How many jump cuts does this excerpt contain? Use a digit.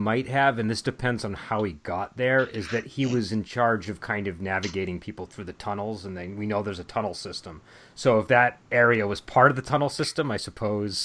0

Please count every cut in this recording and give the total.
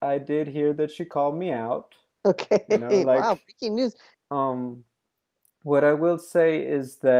2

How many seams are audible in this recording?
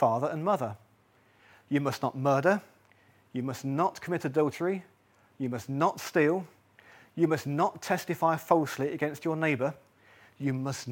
0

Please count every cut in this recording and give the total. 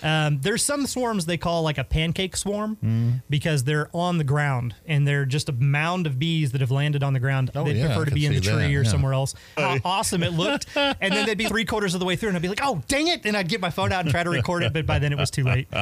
3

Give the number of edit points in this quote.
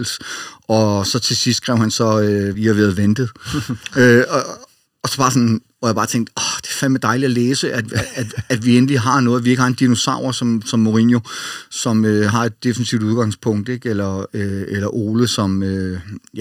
1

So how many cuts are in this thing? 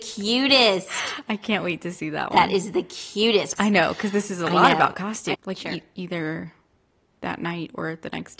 2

